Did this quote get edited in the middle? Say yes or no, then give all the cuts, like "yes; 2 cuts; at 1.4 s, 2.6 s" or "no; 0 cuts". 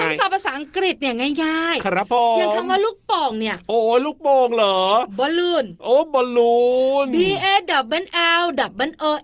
no; 0 cuts